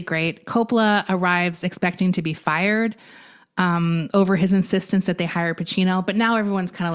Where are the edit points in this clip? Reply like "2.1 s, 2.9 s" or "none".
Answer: none

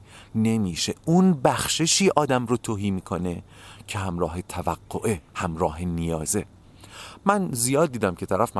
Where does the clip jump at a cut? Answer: 5.3 s

